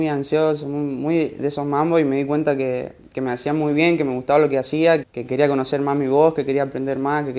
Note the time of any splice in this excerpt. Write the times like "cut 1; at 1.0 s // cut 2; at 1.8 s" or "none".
cut 1; at 5.0 s